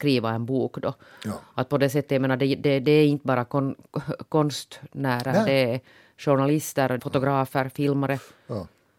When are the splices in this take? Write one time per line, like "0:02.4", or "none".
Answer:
0:07.0